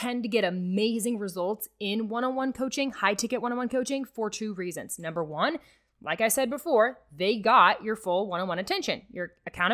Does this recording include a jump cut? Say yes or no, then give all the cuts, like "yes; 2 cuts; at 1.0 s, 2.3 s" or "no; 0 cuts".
no; 0 cuts